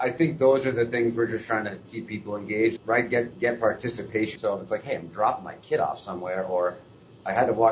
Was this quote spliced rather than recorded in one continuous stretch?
yes; 2 cuts; at 2.8 s, 4.4 s

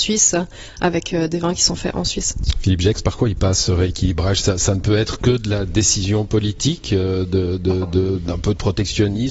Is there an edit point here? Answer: no; 0 cuts

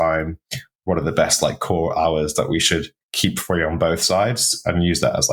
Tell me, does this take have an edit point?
yes; 1 cut; at 3.0 s

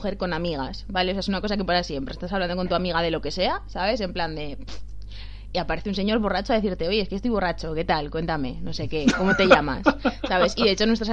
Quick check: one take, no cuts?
yes; 0 cuts

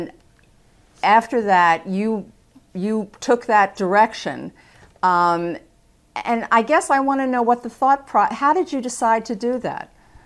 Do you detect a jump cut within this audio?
no; 0 cuts

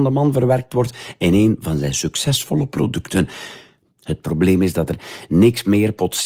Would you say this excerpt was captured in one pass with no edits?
no; 1 cut; at 3.9 s

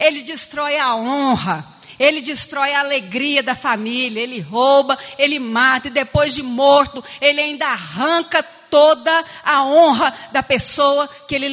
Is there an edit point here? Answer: no; 0 cuts

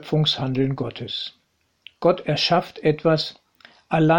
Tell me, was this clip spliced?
no; 0 cuts

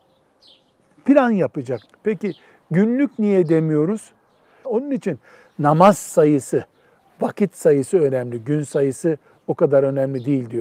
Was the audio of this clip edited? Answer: yes; 2 cuts; at 1.9 s, 4.6 s

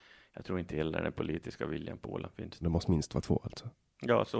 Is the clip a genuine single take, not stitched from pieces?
no; 1 cut; at 2.6 s

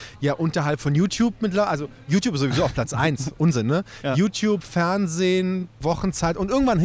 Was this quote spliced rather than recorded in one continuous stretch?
yes; 1 cut; at 5.8 s

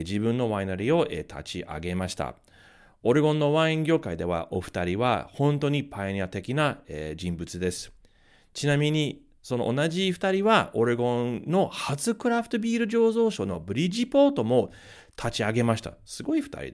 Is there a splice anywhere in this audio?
no; 0 cuts

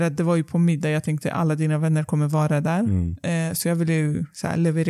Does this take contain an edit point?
no; 0 cuts

